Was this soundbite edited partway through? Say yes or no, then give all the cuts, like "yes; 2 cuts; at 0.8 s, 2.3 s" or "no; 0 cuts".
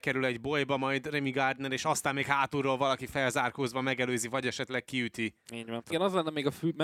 yes; 1 cut; at 5.9 s